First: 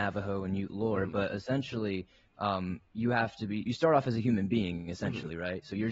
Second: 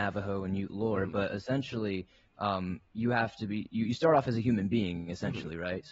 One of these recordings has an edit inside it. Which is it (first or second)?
first